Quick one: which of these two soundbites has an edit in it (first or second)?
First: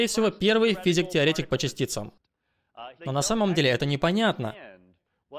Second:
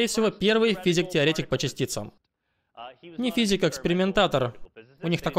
first